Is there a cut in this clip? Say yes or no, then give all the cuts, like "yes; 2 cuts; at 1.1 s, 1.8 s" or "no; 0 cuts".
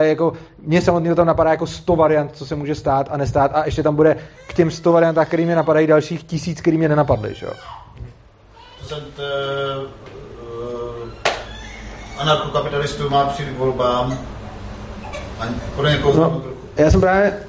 yes; 1 cut; at 8.9 s